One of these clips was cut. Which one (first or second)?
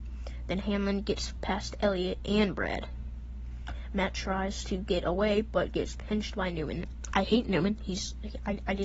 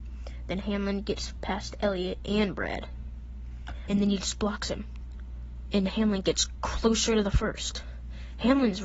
second